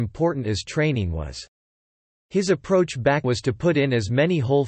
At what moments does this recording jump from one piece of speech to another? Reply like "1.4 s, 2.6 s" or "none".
3.2 s